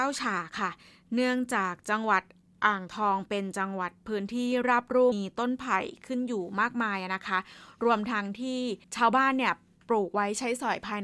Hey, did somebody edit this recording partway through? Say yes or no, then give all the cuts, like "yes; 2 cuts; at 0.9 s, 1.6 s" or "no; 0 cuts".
yes; 2 cuts; at 5.1 s, 8.8 s